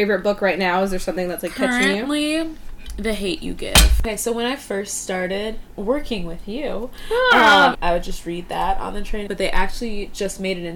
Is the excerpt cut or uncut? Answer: cut